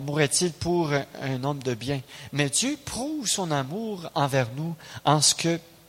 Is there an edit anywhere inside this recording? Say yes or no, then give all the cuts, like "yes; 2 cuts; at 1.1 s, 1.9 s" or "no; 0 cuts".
no; 0 cuts